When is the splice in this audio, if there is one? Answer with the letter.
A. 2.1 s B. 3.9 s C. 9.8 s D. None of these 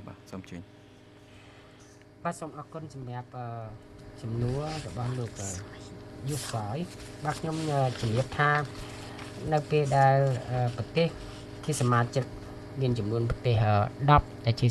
D